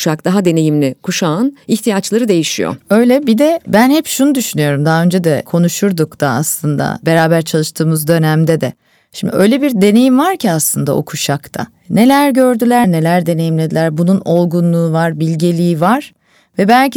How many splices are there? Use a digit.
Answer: 1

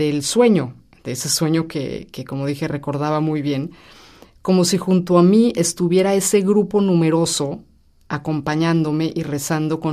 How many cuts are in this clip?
0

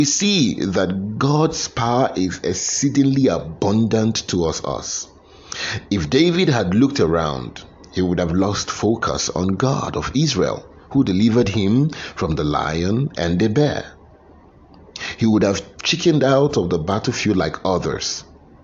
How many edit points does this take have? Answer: 1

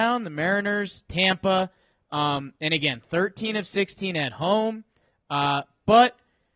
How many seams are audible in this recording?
1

